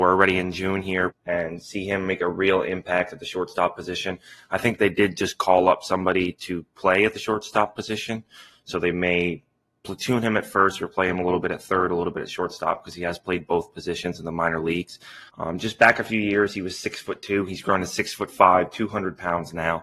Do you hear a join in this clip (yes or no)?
yes